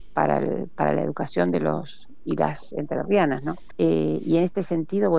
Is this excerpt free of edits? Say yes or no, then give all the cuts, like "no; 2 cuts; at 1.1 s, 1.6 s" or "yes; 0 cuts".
no; 1 cut; at 3.7 s